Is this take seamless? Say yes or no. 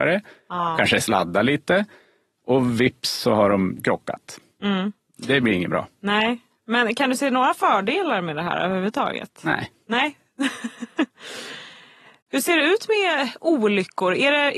yes